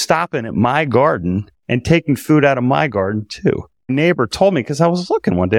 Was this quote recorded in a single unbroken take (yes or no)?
no